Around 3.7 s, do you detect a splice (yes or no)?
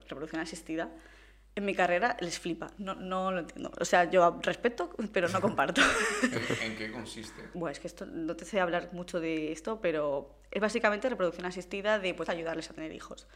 no